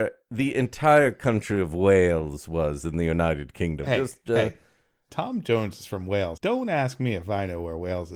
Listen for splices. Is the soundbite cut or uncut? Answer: cut